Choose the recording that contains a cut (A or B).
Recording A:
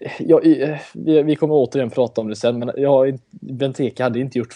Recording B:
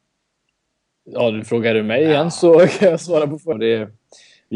B